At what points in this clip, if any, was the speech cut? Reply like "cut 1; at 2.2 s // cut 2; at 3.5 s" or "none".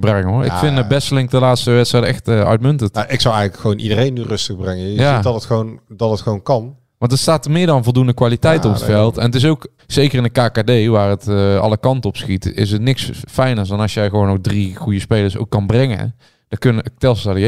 cut 1; at 9.8 s